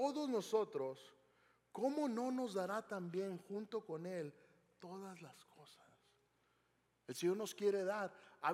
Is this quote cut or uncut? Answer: uncut